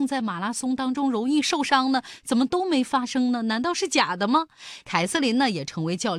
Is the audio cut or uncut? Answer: cut